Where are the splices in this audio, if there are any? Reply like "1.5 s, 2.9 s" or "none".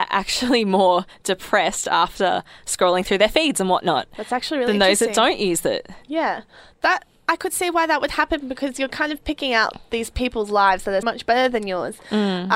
11.0 s